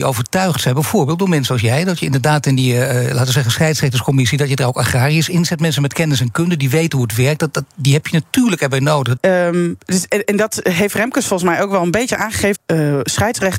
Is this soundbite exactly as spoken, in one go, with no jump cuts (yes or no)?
no